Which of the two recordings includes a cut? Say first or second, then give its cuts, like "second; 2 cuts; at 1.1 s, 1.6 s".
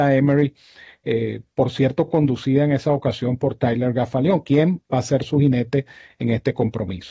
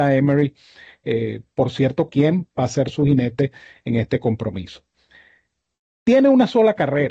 second; 1 cut; at 2.1 s